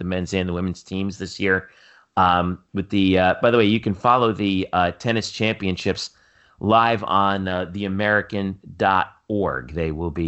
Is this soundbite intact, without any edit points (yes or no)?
yes